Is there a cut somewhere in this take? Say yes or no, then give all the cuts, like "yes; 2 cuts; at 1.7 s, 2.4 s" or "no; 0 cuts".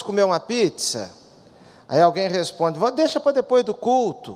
no; 0 cuts